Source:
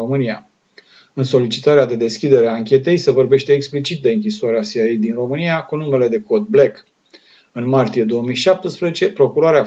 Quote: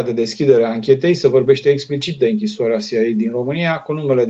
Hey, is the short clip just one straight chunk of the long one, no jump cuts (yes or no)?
yes